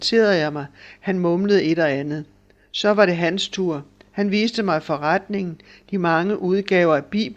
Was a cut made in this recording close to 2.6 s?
no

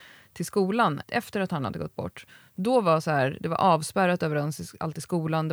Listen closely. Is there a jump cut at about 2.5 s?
no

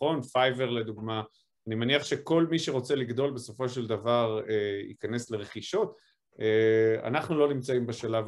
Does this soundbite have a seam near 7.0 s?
no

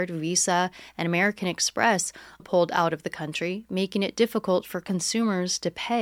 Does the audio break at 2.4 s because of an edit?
yes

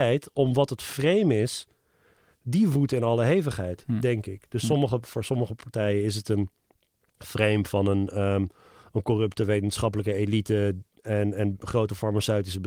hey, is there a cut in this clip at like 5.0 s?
no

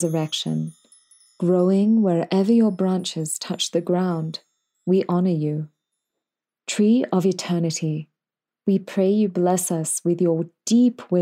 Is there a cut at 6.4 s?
no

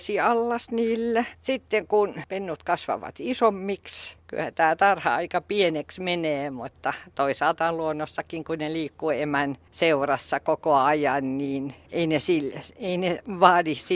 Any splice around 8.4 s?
no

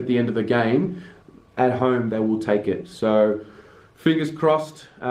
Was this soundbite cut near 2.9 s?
no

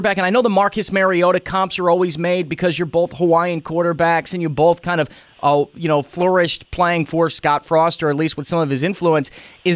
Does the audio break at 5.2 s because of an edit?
no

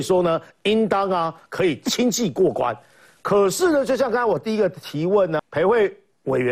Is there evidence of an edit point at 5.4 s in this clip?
yes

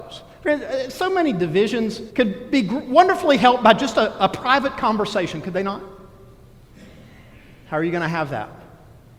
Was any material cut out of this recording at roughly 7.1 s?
no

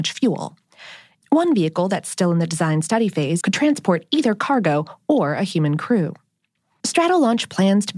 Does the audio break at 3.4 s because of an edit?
yes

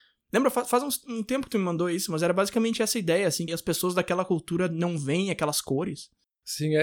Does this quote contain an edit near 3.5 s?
yes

